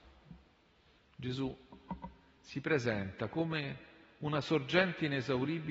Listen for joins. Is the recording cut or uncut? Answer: cut